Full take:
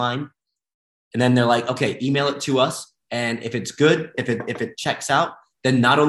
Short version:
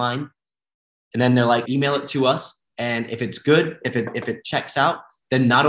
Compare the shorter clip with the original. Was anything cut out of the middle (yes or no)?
yes